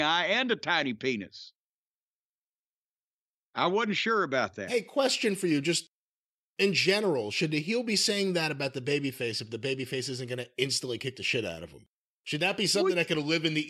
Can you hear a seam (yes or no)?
no